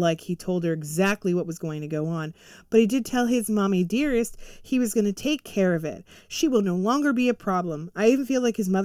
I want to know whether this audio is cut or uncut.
uncut